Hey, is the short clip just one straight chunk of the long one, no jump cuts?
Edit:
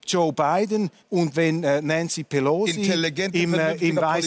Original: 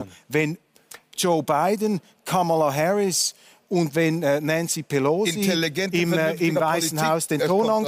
no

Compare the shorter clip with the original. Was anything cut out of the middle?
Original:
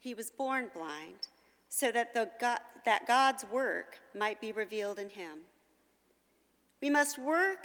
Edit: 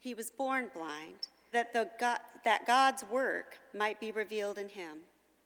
yes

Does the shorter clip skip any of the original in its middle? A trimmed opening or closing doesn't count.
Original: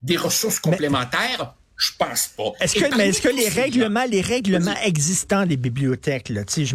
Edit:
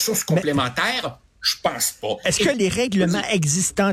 yes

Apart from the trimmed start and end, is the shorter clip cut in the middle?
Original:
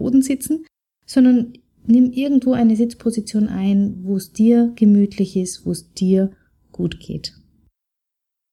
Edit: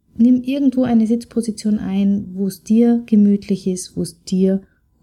no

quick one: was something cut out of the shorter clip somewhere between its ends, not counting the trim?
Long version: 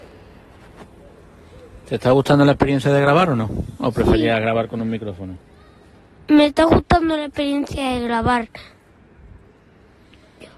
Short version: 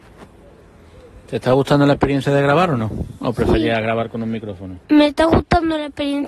yes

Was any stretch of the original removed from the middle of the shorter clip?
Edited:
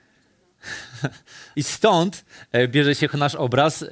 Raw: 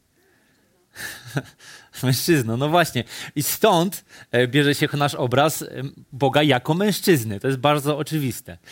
yes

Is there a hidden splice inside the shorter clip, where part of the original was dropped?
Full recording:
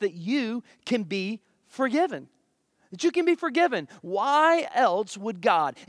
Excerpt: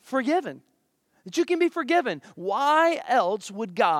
no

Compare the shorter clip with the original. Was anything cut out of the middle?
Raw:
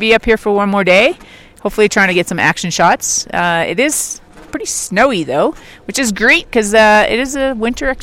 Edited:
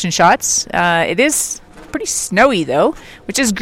no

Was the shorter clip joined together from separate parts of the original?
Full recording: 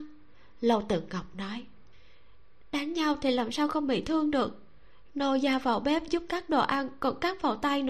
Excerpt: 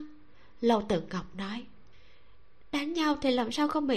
no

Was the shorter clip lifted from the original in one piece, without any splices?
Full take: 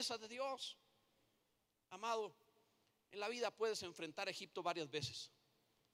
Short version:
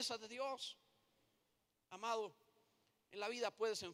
yes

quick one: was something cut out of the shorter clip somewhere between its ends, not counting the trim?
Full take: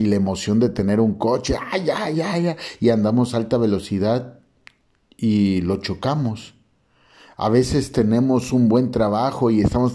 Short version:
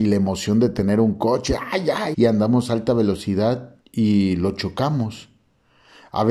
yes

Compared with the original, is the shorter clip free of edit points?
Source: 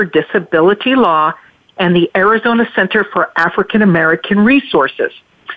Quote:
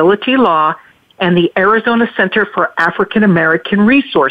yes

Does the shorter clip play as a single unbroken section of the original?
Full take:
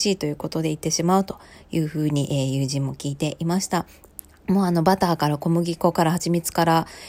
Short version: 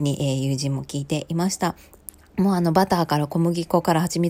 yes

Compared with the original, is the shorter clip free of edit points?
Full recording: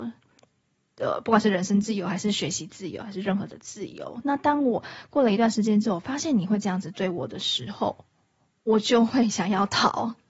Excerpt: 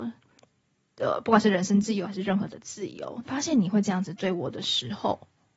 no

